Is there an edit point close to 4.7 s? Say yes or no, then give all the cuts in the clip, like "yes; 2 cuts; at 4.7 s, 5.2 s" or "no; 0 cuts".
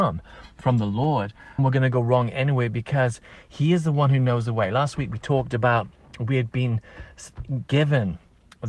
no; 1 cut; at 1.6 s